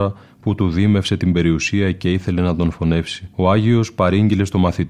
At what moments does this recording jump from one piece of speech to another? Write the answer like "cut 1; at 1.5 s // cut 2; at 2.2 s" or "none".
cut 1; at 3.3 s